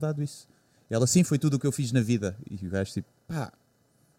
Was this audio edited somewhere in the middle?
no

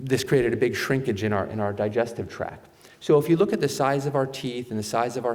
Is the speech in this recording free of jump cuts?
no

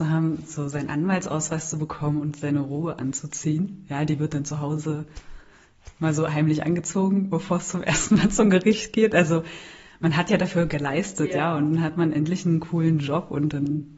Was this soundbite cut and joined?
no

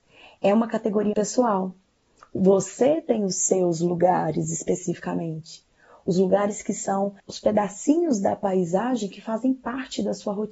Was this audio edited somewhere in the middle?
yes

